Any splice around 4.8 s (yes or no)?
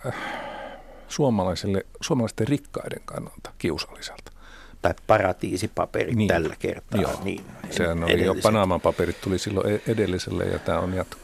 yes